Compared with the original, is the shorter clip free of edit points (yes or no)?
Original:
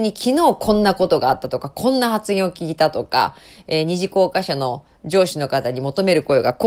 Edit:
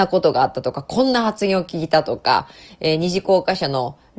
yes